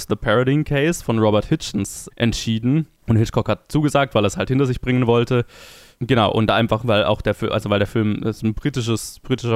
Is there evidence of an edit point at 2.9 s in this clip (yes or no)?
no